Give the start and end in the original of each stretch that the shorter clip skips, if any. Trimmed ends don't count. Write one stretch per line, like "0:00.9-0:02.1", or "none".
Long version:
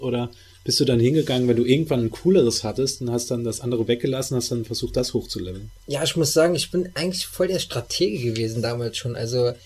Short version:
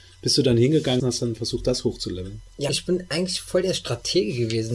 0:01.4-0:04.3
0:06.0-0:06.5